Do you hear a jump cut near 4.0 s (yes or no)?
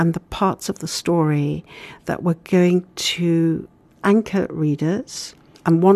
yes